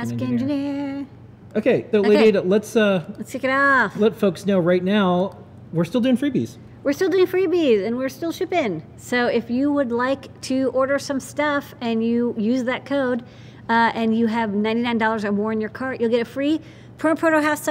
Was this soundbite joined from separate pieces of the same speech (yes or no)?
yes